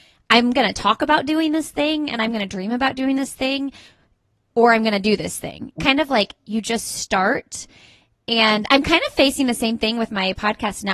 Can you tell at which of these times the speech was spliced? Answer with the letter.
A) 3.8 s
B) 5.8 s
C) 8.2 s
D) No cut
B